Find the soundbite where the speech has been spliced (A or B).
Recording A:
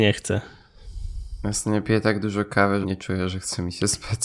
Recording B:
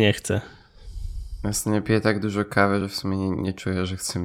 A